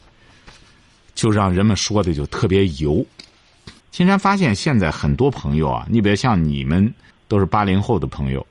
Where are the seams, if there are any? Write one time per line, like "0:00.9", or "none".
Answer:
0:03.8
0:07.1